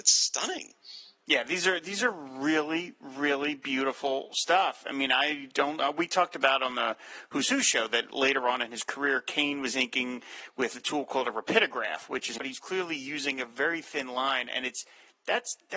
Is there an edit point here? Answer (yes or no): yes